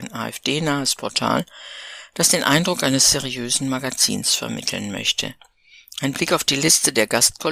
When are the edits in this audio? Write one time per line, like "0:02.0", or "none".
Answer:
none